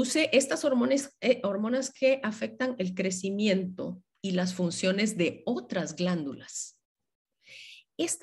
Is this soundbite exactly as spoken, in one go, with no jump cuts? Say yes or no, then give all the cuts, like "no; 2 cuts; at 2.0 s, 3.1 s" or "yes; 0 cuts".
yes; 0 cuts